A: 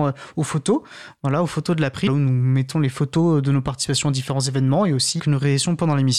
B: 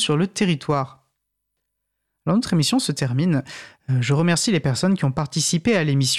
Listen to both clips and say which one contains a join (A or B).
A